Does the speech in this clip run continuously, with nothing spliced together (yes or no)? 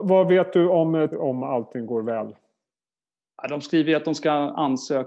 no